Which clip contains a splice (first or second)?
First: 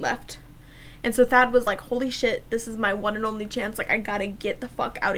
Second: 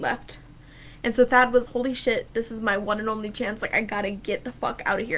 second